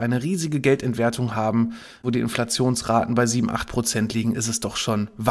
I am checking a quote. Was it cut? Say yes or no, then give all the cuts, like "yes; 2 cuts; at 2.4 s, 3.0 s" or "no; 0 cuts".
no; 0 cuts